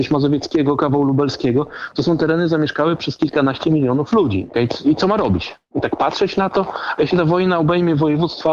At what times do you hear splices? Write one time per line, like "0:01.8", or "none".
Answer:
0:04.5